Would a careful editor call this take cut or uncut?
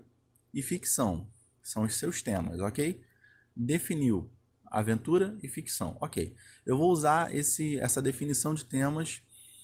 uncut